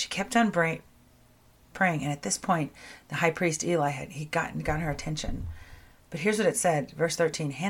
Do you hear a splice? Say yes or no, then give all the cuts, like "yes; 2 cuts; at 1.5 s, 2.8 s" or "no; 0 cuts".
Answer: no; 0 cuts